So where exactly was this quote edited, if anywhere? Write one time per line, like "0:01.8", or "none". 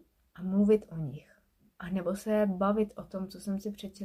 none